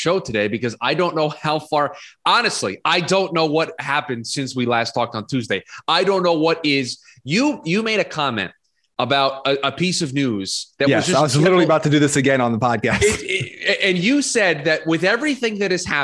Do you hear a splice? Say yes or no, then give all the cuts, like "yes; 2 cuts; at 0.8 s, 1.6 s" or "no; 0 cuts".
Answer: no; 0 cuts